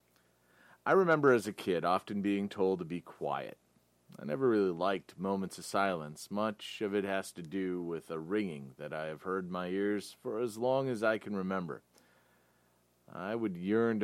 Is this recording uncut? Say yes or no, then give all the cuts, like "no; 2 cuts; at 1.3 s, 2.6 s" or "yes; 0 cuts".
yes; 0 cuts